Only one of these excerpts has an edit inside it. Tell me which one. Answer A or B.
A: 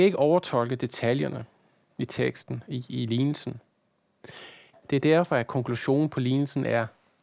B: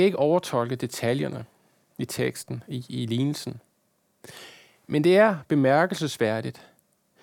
A